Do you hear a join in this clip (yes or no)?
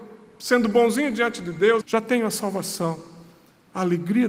yes